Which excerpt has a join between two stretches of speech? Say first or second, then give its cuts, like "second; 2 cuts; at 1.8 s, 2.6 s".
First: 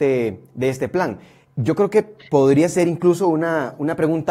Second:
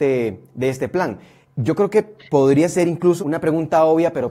second; 1 cut; at 3.2 s